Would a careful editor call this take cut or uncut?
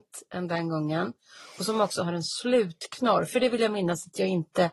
uncut